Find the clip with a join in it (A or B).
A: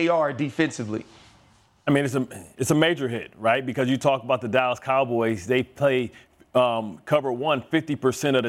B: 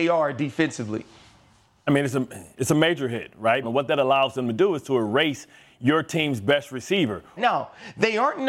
B